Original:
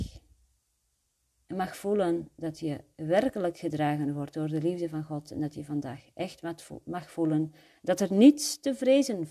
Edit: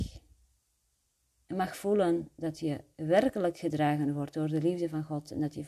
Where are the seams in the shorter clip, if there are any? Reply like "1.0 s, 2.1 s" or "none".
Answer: none